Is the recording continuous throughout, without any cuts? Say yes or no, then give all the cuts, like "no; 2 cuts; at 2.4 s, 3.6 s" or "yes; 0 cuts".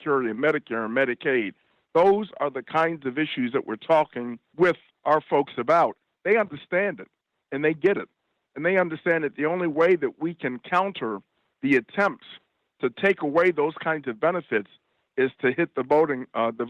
yes; 0 cuts